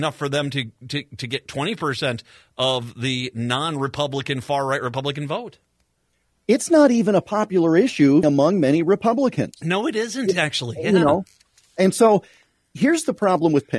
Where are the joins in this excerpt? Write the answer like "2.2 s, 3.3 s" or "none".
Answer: 8.2 s